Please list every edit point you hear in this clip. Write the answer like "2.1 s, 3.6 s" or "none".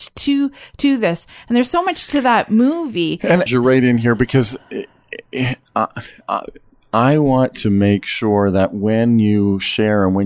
3.5 s, 6.2 s